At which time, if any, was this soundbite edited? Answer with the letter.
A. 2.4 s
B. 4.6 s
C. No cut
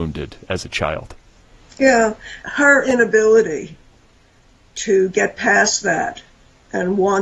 A